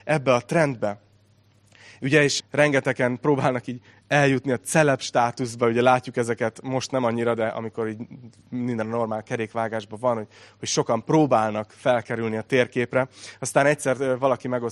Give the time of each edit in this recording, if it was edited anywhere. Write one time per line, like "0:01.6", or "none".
0:02.4